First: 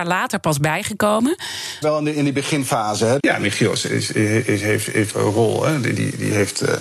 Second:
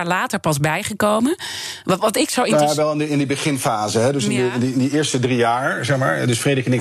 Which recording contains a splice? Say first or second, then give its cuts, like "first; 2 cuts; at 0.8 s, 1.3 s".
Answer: first; 3 cuts; at 1.8 s, 3.2 s, 5.1 s